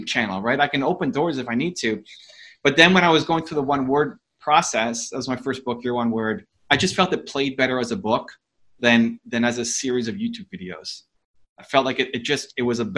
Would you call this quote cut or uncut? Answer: uncut